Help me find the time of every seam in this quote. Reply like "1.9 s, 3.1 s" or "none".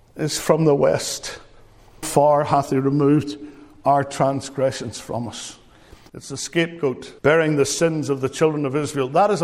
2.0 s, 6.1 s, 7.2 s